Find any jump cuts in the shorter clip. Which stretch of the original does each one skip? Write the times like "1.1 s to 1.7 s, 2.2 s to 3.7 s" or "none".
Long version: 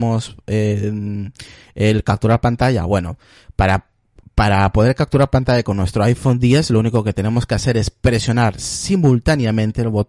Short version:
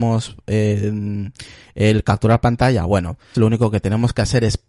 3.3 s to 6.7 s